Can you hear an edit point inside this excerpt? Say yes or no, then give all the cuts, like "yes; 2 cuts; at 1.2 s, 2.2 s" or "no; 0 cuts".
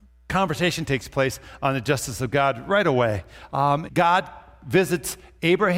yes; 1 cut; at 3.9 s